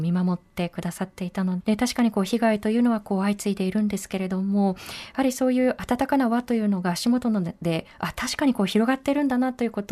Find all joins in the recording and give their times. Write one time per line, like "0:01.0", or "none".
0:01.6